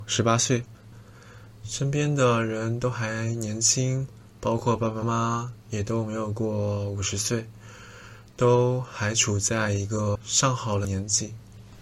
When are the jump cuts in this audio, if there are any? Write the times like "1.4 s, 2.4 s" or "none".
5.0 s